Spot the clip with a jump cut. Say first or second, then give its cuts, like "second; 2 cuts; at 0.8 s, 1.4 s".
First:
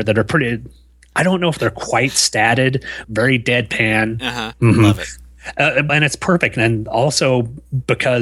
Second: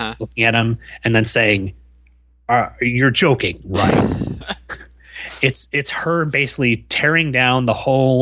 first; 3 cuts; at 3.0 s, 4.5 s, 5.9 s